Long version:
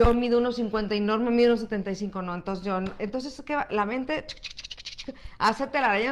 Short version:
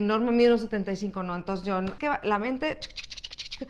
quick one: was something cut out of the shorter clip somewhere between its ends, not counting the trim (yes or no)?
yes